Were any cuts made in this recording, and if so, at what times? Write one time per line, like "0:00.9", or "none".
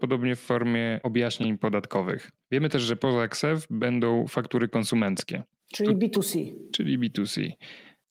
none